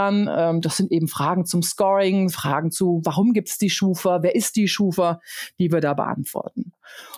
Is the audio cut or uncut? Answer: uncut